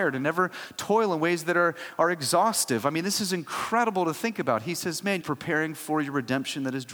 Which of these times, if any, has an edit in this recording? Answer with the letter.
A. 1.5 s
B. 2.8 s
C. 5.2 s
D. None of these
C